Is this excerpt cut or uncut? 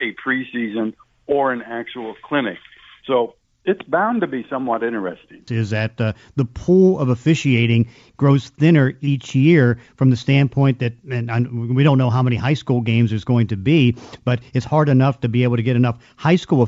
cut